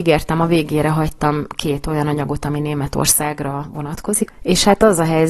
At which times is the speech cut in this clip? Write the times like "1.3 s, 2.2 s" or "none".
4.3 s

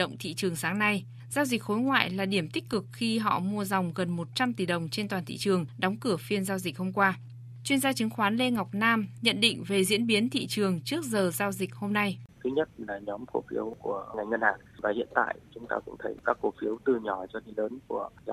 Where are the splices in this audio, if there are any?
9.2 s, 12.3 s

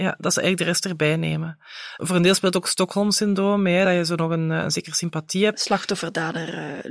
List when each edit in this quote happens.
none

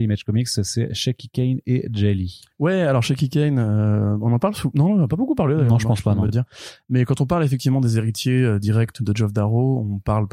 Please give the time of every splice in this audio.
none

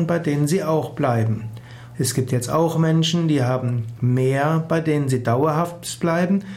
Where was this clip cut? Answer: 1.9 s

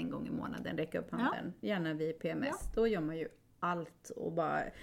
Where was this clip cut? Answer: none

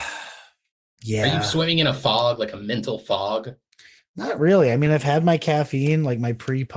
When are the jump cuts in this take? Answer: none

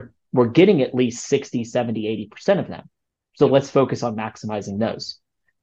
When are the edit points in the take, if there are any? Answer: none

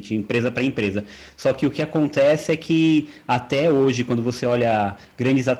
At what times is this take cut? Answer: none

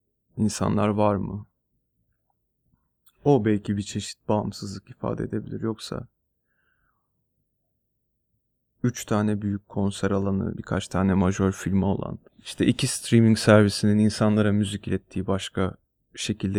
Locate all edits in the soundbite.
10.6 s, 12.3 s

